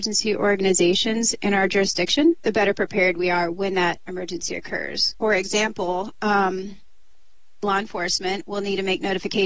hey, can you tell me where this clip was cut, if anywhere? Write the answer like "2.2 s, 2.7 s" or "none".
none